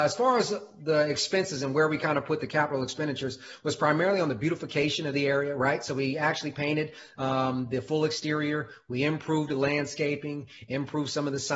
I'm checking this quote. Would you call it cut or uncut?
uncut